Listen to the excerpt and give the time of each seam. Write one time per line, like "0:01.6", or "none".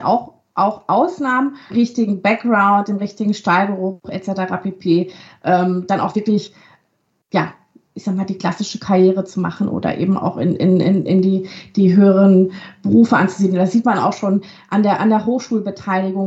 0:01.7